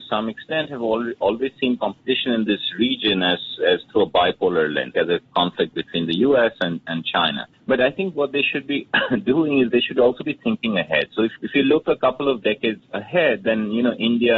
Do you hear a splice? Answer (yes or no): yes